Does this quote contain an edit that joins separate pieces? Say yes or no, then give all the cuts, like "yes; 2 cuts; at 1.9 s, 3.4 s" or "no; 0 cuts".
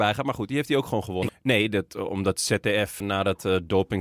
yes; 2 cuts; at 1.3 s, 3.0 s